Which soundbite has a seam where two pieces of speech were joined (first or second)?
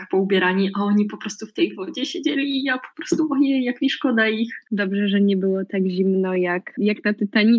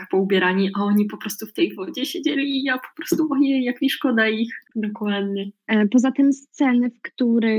second